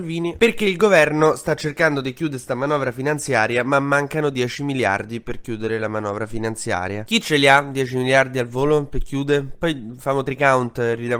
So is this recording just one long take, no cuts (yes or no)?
yes